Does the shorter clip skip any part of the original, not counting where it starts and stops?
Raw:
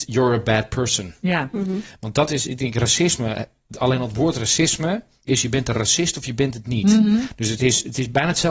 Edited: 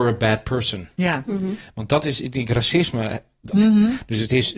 yes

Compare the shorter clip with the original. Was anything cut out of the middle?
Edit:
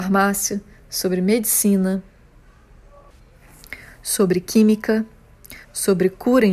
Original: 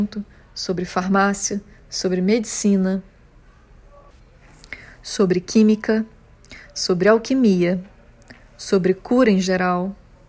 yes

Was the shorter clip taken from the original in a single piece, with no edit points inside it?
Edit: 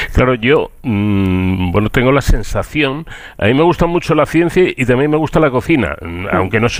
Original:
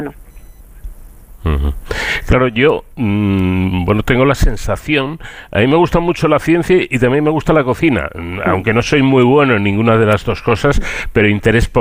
yes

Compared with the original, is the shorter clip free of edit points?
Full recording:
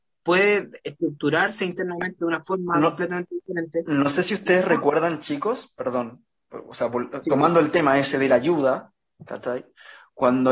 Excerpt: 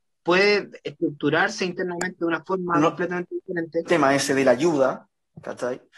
no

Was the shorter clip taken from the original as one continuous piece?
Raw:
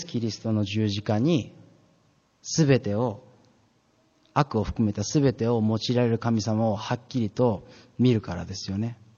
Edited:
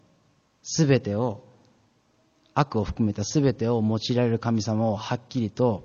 yes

